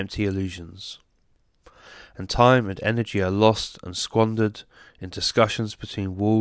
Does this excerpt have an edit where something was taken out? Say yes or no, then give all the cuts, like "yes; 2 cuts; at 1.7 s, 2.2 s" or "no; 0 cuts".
no; 0 cuts